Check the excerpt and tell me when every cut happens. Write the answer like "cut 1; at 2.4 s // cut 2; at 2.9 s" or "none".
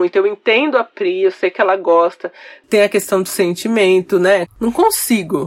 cut 1; at 4.5 s